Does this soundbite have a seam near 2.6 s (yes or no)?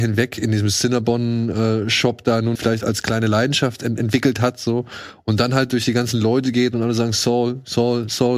yes